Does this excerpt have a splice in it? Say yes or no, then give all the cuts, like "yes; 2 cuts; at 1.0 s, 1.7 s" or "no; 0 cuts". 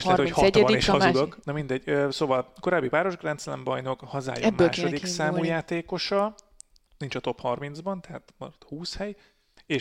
yes; 1 cut; at 1.4 s